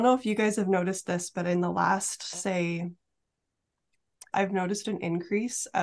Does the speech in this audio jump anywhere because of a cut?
yes; 1 cut; at 4.3 s

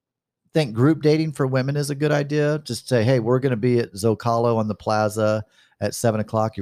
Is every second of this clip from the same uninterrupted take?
yes; 0 cuts

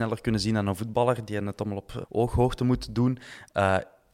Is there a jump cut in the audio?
yes; 1 cut; at 2.0 s

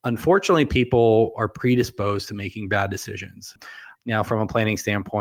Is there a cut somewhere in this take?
yes; 1 cut; at 3.9 s

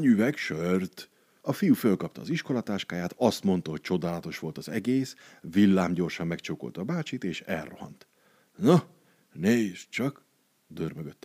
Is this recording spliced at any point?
no; 0 cuts

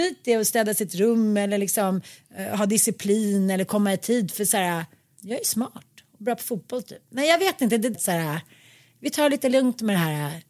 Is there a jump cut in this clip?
yes; 1 cut; at 7.9 s

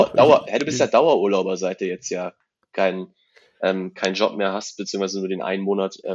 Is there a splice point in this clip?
no; 0 cuts

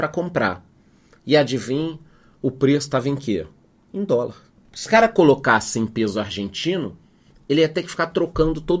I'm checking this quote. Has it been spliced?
yes; 1 cut; at 4.6 s

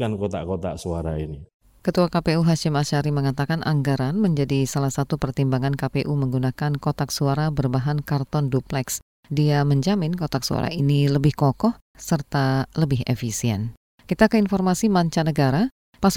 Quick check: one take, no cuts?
no; 1 cut; at 11.9 s

